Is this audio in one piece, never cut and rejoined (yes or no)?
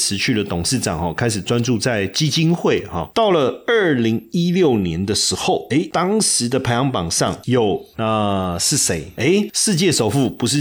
no